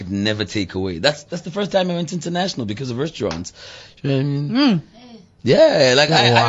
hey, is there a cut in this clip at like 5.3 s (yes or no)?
no